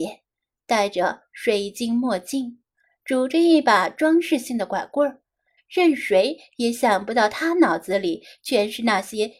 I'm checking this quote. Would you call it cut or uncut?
cut